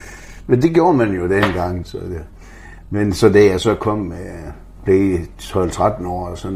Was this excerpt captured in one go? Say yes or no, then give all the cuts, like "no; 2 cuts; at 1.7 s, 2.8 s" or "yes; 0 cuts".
no; 1 cut; at 1.8 s